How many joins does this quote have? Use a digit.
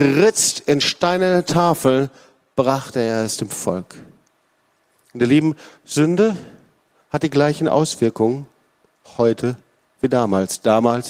0